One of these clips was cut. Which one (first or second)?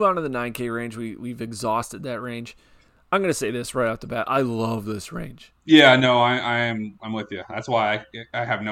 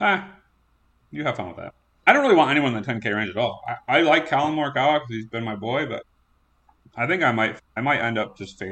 first